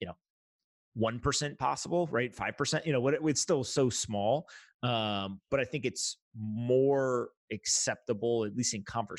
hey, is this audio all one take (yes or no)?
yes